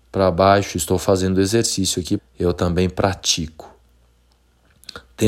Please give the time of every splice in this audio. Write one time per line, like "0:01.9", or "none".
0:02.2